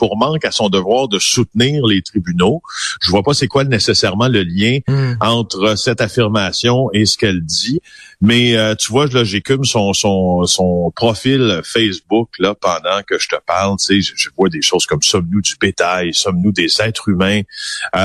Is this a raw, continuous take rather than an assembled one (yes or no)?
yes